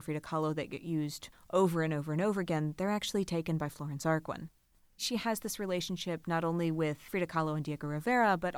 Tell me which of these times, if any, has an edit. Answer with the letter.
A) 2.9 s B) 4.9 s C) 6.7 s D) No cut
D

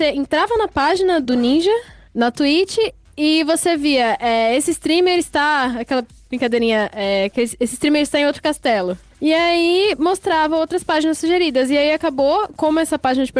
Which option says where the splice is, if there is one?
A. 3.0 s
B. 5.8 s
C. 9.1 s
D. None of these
D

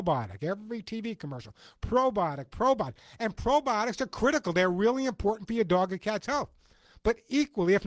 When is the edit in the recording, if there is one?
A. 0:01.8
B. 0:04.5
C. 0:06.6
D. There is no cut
D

